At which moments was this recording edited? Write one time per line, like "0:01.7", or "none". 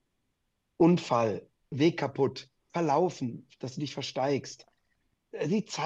0:01.7

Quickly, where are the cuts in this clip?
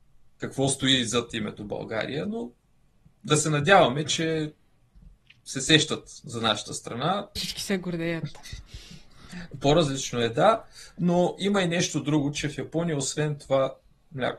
0:07.4

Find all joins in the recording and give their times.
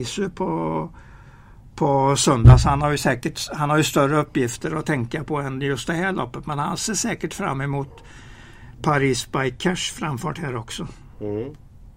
none

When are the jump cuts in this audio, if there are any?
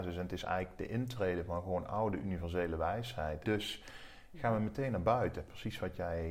0:03.4

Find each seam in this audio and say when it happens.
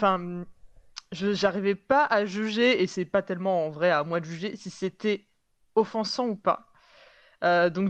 none

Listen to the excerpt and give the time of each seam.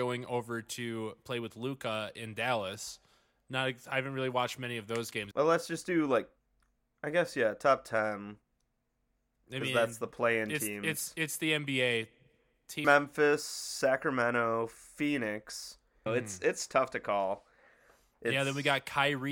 0:05.3
0:12.8
0:16.1

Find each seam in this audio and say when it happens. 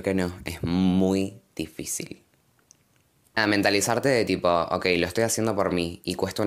0:03.3

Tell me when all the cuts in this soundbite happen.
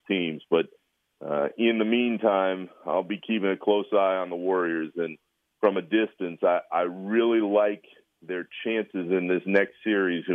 none

